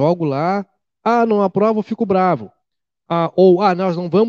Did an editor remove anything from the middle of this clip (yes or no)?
no